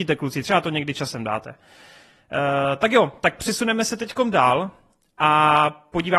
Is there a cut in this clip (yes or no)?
no